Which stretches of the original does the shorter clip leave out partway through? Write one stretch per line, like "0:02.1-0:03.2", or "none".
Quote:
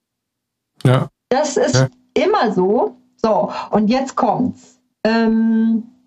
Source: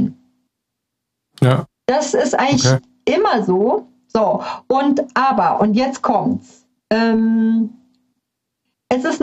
0:02.3-0:02.6
0:04.6-0:05.6